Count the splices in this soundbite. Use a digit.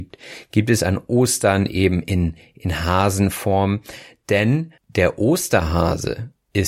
1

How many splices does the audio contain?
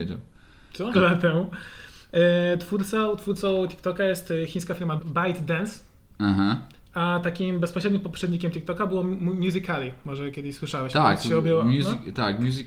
2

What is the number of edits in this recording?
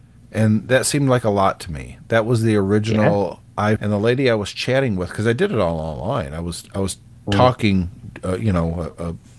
1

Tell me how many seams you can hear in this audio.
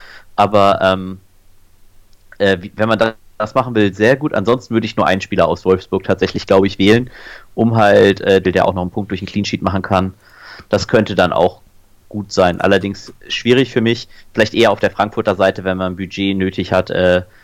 1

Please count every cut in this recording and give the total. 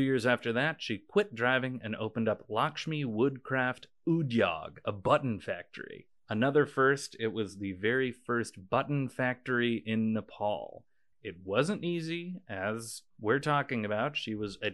1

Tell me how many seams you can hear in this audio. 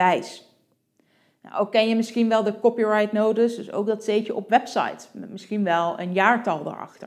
0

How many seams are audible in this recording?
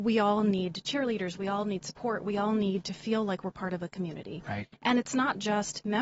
0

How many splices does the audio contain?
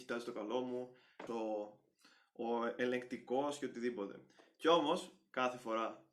1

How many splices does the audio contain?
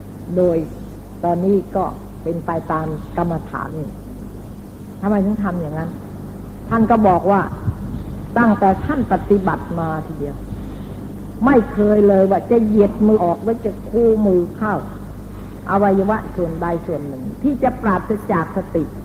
2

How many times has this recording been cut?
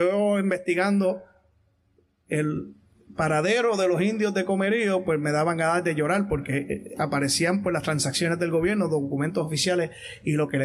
0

